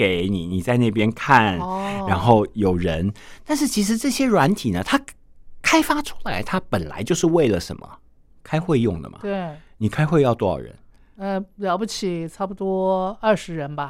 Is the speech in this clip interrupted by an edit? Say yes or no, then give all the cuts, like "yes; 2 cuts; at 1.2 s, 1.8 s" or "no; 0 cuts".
no; 0 cuts